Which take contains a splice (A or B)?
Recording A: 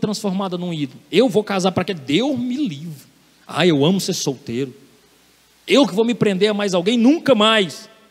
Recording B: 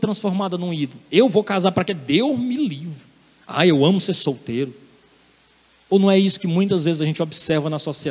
A